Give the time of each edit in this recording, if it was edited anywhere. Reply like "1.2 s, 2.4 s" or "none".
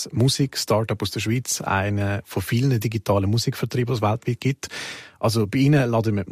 none